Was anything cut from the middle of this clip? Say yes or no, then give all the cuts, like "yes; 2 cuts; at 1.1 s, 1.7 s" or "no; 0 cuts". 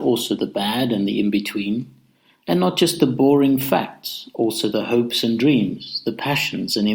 no; 0 cuts